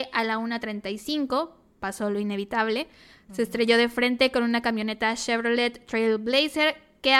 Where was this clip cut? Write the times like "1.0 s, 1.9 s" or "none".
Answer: none